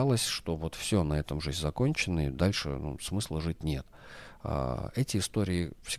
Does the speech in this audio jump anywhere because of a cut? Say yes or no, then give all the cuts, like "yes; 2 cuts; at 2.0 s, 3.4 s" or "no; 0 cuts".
no; 0 cuts